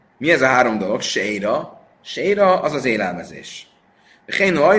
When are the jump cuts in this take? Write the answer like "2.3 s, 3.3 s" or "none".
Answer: none